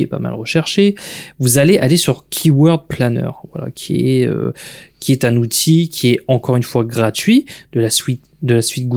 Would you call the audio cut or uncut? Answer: uncut